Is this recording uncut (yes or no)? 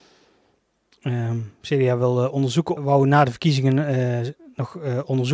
no